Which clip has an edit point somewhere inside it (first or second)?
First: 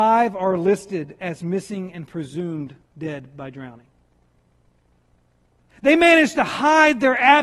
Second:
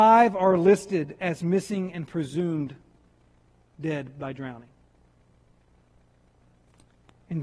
first